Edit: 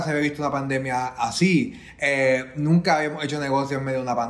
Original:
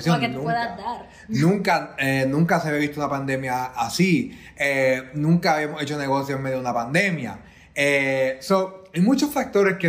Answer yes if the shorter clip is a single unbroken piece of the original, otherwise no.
yes